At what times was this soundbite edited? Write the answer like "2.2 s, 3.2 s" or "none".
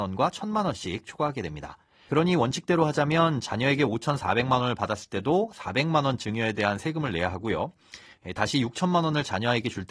2.1 s